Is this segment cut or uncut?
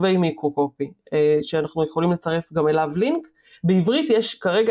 cut